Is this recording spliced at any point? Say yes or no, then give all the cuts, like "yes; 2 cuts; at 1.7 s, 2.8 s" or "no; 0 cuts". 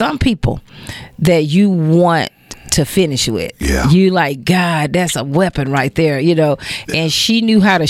no; 0 cuts